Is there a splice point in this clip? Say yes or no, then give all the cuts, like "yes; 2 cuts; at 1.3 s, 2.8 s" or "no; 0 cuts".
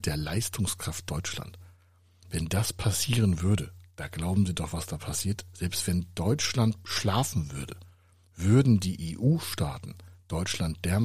no; 0 cuts